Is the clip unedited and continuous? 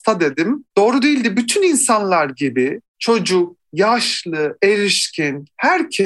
no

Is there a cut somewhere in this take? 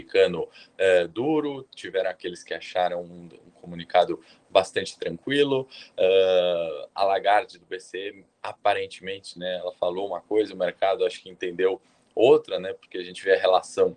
no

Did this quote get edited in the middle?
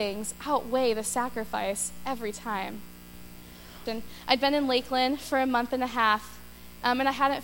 yes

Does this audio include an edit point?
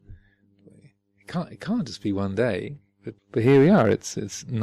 yes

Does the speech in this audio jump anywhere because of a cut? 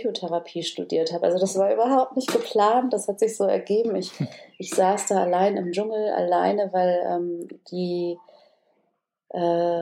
no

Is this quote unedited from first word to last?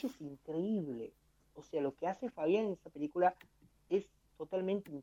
yes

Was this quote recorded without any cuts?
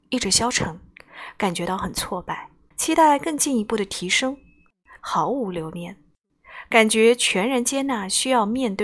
no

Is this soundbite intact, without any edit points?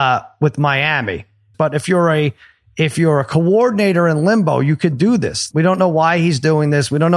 no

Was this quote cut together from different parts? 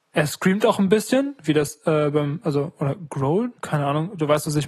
yes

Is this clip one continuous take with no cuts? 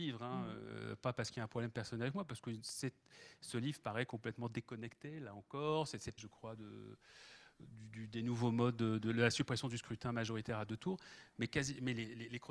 no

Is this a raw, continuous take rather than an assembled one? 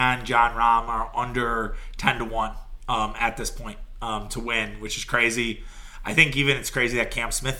yes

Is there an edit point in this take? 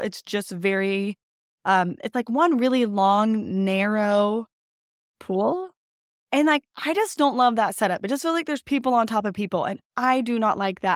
no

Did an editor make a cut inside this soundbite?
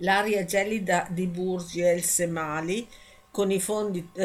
no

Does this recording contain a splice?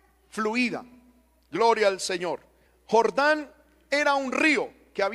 yes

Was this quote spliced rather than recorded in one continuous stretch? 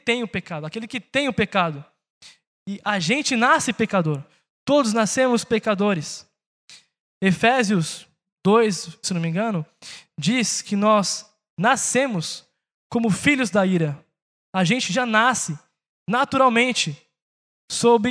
yes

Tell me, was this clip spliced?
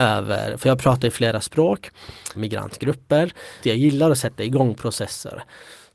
yes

